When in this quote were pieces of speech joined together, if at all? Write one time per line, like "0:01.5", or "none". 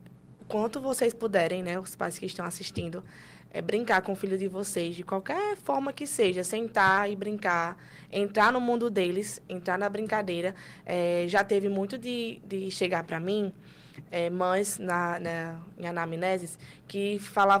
none